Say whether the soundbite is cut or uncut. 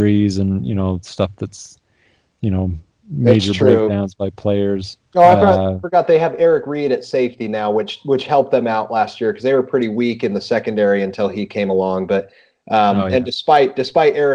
cut